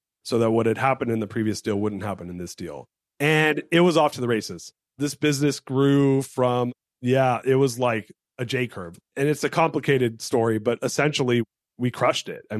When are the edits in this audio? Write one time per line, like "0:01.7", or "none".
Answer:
0:09.0